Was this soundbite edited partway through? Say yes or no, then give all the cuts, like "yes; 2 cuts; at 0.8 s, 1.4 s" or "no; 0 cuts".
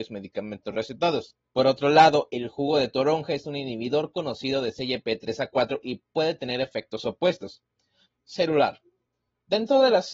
yes; 2 cuts; at 1.4 s, 8.0 s